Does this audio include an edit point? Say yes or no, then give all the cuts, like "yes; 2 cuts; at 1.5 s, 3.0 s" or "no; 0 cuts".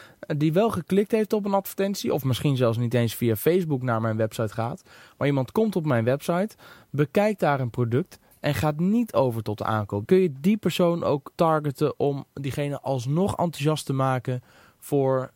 yes; 2 cuts; at 10.0 s, 11.3 s